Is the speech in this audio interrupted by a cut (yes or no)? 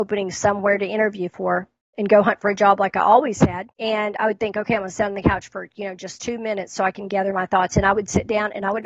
yes